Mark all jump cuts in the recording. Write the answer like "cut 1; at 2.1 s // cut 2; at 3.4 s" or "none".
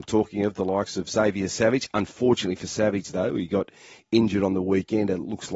none

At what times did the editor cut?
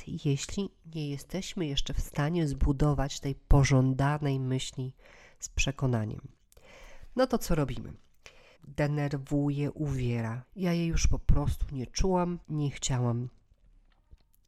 cut 1; at 8.6 s // cut 2; at 10.4 s // cut 3; at 12.4 s

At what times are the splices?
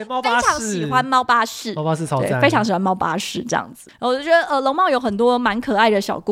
none

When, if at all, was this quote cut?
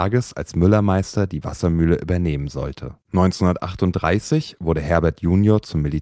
cut 1; at 3.0 s

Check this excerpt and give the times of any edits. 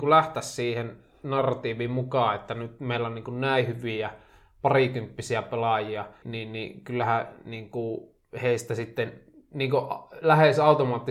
cut 1; at 6.2 s

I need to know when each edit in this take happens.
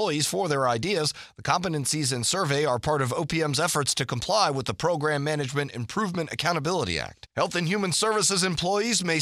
cut 1; at 7.3 s

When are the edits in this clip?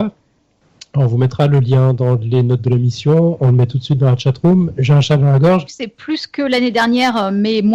cut 1; at 5.7 s

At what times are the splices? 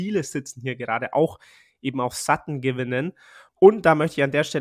none

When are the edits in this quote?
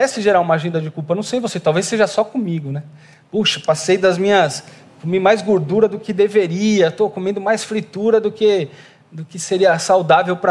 none

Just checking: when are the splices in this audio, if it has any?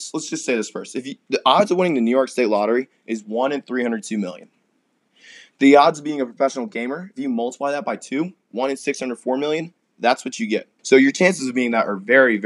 cut 1; at 10.8 s

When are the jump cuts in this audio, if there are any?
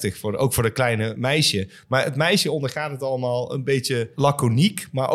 none

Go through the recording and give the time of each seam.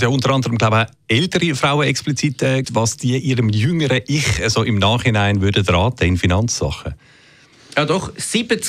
cut 1; at 2.6 s

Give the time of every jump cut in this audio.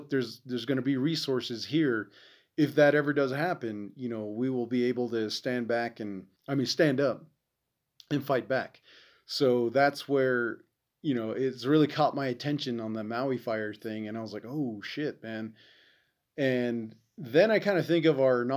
cut 1; at 6.4 s

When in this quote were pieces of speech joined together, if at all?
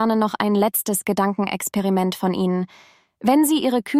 none

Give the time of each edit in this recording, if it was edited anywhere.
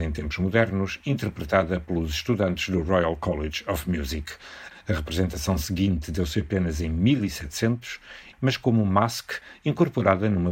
cut 1; at 4.7 s // cut 2; at 8.3 s

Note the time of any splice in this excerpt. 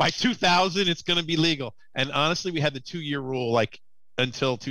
none

